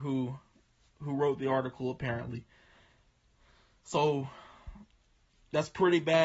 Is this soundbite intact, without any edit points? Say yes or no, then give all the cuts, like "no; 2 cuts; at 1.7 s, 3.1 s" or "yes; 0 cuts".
yes; 0 cuts